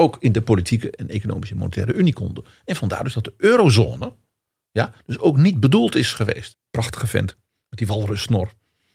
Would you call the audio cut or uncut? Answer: cut